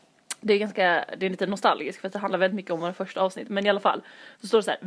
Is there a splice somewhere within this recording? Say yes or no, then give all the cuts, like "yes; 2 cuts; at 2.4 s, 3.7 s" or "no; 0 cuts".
no; 0 cuts